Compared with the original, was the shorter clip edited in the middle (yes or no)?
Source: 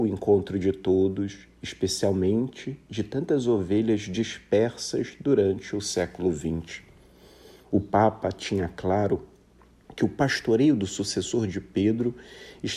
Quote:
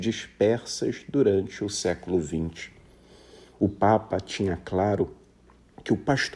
no